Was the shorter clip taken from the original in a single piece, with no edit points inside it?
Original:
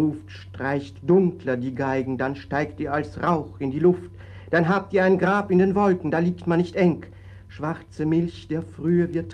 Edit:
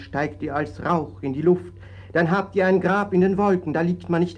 yes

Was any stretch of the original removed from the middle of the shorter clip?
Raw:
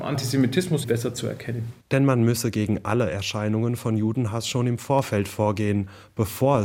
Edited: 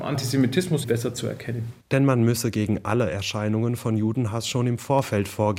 no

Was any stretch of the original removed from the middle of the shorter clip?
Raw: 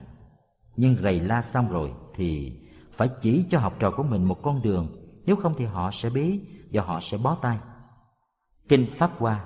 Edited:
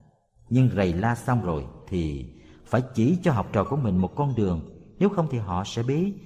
no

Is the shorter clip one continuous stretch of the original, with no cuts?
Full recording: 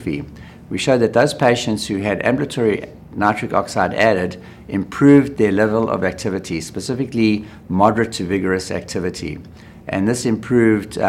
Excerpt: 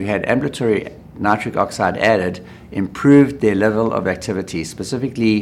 yes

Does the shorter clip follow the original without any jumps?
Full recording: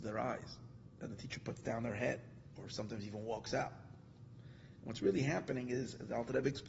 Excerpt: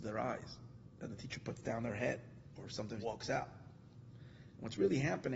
no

